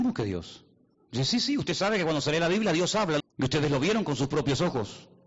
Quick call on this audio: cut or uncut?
cut